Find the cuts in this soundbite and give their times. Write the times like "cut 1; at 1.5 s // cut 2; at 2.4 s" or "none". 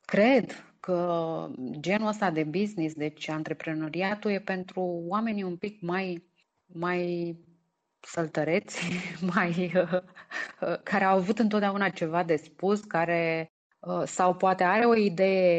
none